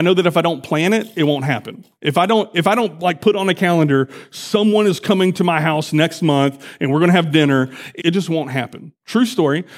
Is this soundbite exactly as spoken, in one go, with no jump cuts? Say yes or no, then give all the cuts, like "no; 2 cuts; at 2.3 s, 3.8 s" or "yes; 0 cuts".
no; 1 cut; at 8.0 s